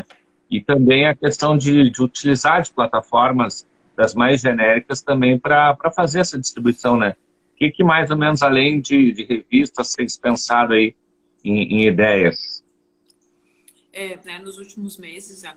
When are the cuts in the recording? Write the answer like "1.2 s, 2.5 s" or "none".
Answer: 9.9 s, 14.2 s